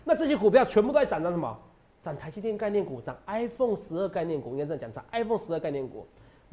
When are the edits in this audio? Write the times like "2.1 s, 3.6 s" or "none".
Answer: none